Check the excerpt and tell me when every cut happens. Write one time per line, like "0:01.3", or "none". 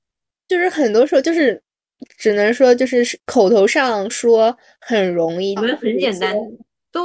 0:04.1
0:05.6